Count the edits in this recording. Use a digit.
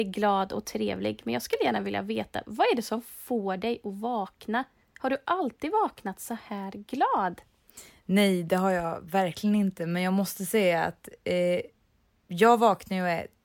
0